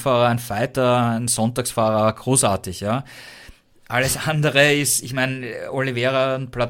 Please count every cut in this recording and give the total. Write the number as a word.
zero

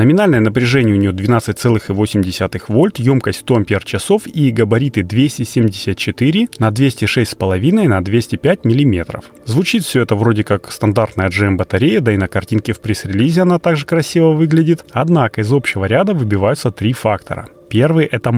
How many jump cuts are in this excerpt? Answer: zero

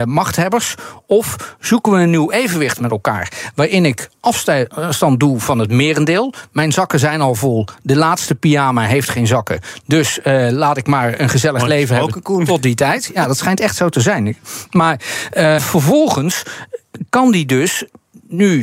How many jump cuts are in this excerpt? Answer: one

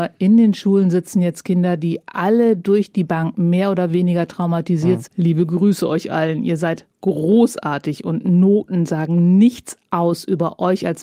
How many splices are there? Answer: one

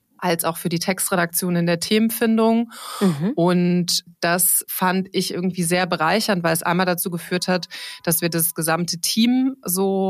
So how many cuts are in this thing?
zero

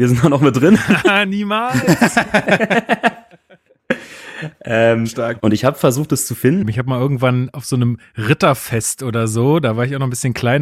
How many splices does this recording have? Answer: two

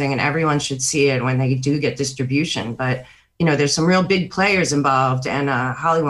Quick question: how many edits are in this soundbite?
zero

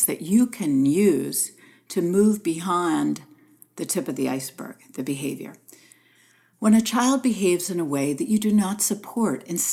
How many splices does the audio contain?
zero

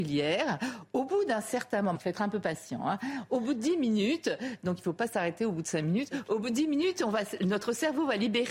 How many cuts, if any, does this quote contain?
one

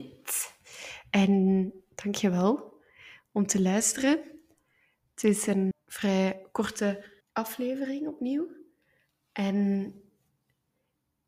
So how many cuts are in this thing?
two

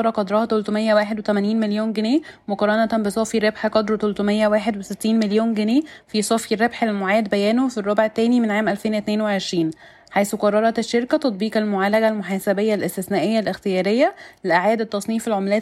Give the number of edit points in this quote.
zero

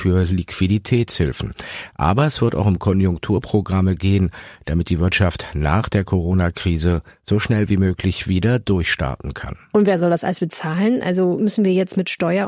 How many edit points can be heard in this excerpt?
zero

